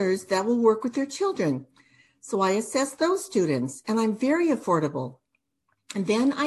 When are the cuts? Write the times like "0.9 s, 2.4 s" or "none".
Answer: none